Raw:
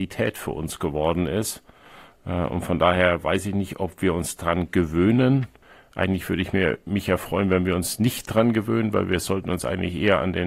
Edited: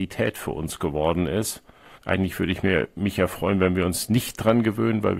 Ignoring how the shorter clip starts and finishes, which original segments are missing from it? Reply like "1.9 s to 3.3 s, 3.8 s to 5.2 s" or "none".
1.9 s to 5.8 s